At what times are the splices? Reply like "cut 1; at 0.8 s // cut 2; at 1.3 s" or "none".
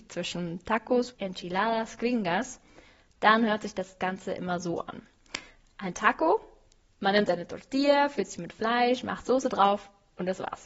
cut 1; at 1.1 s